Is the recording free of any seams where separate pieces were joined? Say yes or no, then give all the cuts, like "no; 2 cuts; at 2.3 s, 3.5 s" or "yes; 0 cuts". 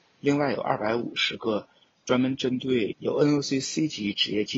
no; 1 cut; at 2.9 s